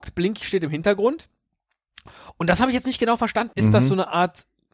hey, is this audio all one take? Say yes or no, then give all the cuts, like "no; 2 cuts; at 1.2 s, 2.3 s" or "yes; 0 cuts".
no; 1 cut; at 3.5 s